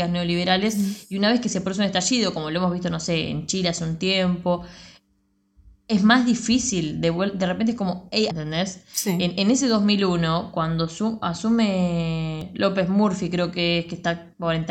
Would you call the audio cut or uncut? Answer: cut